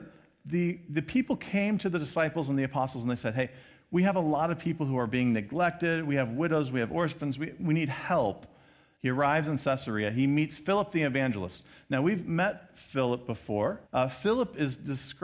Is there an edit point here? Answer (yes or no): yes